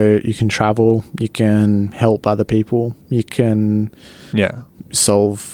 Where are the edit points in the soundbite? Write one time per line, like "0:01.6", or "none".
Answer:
none